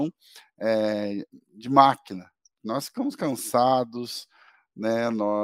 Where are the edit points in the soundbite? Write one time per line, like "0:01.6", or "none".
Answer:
none